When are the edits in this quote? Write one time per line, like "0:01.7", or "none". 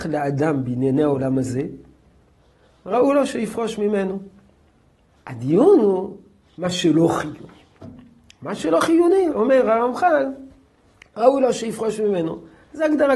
0:05.1
0:09.3